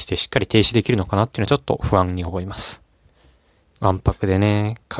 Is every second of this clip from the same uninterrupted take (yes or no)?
no